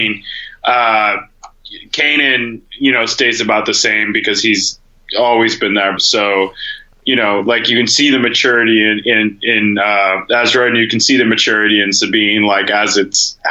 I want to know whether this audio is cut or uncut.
cut